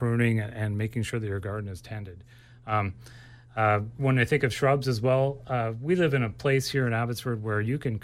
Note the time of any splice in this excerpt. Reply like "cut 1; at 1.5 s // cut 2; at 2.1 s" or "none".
none